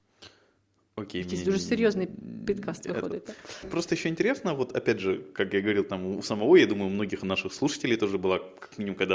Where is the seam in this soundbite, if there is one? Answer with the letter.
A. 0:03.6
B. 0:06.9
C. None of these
A